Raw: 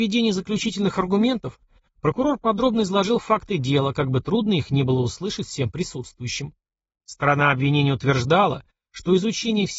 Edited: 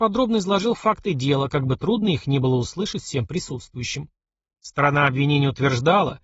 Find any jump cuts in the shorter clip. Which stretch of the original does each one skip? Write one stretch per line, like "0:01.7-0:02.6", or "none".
none